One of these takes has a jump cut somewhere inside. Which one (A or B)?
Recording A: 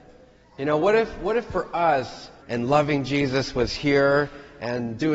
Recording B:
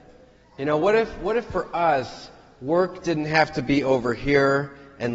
A